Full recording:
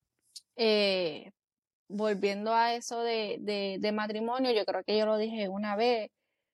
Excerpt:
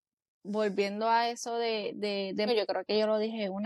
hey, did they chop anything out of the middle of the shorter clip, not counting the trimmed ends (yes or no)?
yes